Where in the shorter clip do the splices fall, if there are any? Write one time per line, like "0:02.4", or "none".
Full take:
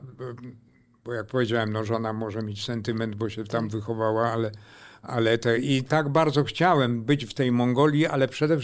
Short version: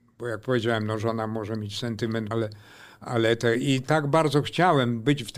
0:02.3